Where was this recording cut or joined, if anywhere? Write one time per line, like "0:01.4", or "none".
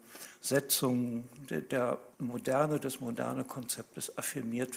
0:02.1